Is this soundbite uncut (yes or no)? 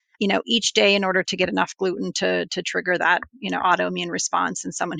yes